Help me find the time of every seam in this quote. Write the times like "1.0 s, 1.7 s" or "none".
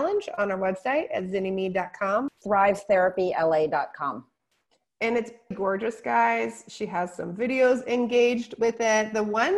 2.3 s, 5.5 s